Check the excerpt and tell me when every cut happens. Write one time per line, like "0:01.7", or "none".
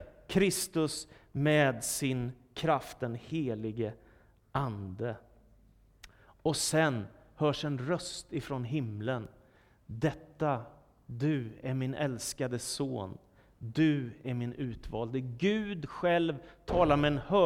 none